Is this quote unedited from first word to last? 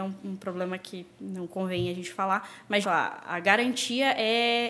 no; 1 cut; at 2.8 s

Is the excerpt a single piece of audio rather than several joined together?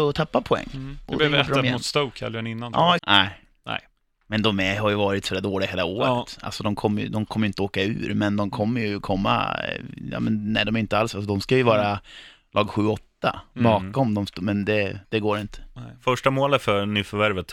no; 2 cuts; at 3.0 s, 15.0 s

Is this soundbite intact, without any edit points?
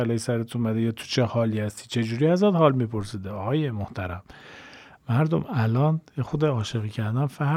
yes; 0 cuts

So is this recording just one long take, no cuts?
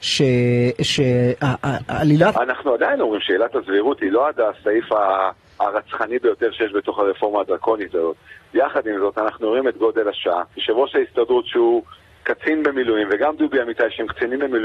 no; 2 cuts; at 2.3 s, 10.5 s

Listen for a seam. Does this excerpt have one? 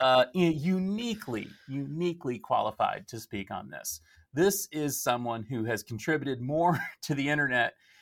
no; 0 cuts

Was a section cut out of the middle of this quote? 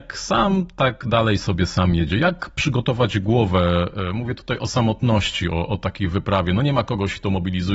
no; 0 cuts

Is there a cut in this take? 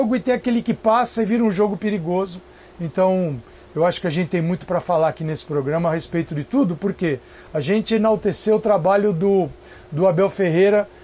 no; 0 cuts

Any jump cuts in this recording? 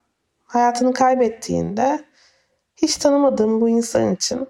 no; 0 cuts

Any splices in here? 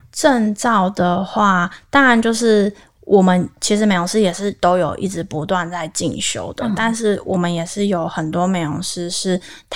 no; 0 cuts

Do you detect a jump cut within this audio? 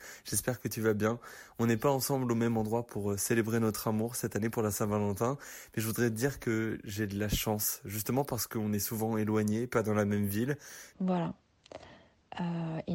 yes; 1 cut; at 10.9 s

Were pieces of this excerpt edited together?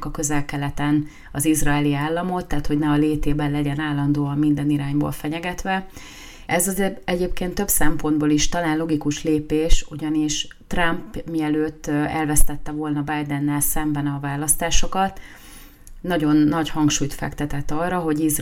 yes; 1 cut; at 6.5 s

